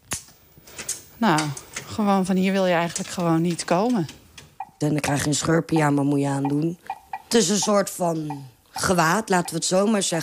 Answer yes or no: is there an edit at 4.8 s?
yes